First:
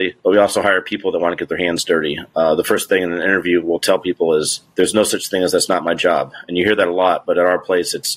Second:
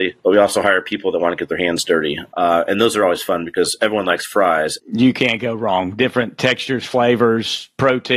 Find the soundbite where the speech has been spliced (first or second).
second